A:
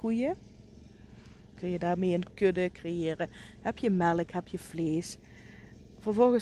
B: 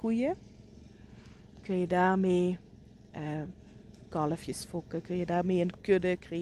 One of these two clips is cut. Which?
A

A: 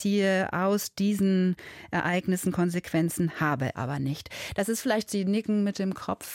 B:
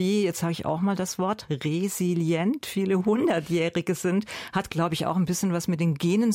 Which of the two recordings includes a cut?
A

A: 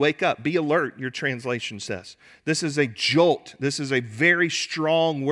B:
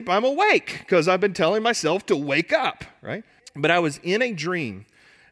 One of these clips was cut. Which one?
B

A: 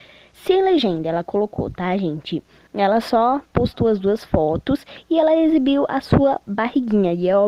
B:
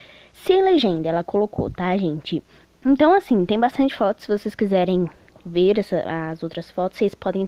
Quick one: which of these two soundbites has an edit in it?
B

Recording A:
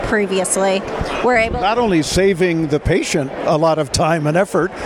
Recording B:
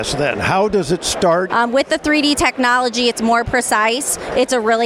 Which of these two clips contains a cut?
B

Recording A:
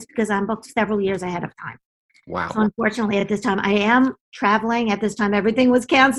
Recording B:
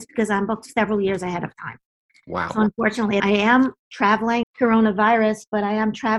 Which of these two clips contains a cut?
B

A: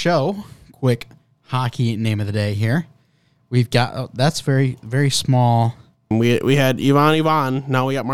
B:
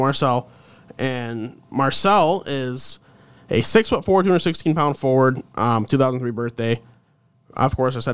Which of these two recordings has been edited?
A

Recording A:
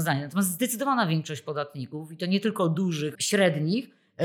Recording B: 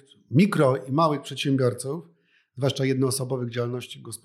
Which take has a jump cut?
A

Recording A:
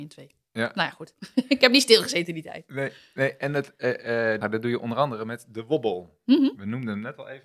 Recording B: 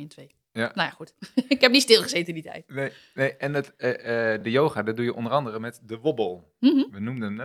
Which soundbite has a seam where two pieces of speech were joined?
A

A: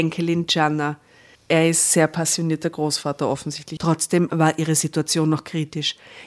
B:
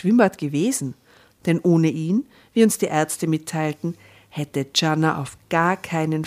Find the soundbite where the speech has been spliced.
A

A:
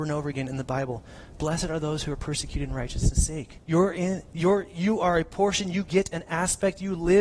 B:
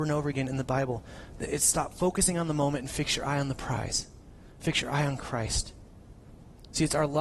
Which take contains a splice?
A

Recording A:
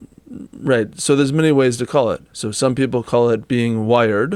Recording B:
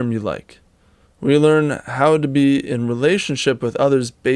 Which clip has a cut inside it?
B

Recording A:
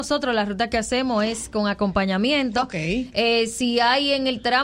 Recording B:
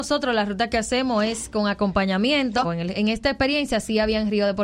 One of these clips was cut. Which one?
B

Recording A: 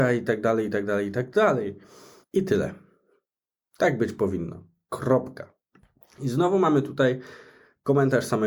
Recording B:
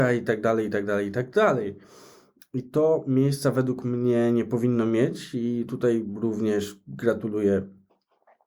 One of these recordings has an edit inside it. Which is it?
A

